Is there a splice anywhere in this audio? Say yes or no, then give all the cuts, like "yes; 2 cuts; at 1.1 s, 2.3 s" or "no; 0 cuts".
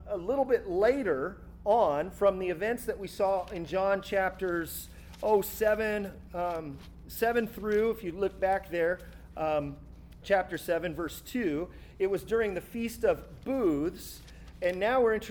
yes; 1 cut; at 10.2 s